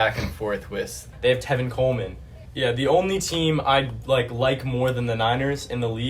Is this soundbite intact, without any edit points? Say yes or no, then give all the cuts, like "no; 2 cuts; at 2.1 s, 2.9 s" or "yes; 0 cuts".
no; 2 cuts; at 1.1 s, 2.5 s